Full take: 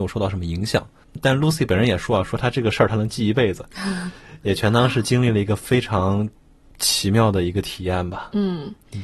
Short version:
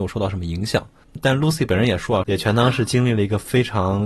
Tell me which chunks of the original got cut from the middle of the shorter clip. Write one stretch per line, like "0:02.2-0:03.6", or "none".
0:02.2-0:04.4